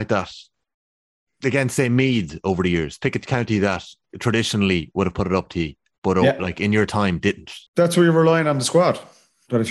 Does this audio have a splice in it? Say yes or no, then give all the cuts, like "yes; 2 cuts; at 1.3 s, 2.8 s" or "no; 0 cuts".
yes; 1 cut; at 7.7 s